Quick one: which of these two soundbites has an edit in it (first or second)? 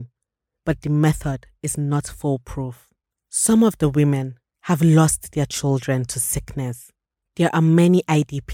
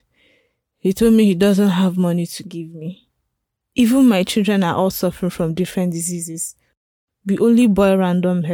first